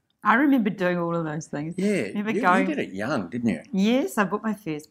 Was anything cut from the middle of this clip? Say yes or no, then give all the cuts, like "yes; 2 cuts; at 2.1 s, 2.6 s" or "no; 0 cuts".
no; 0 cuts